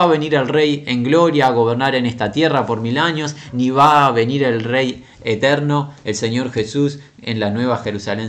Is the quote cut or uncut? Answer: uncut